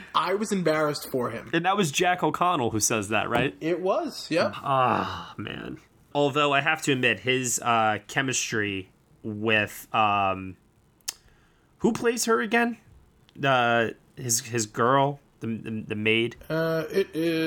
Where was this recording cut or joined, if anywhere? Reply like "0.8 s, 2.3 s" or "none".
4.5 s, 6.1 s, 15.3 s